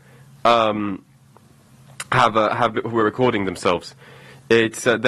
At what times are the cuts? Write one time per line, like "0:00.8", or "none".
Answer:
none